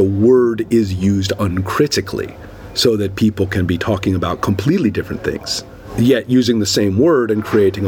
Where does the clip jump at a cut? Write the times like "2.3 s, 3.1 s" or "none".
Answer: none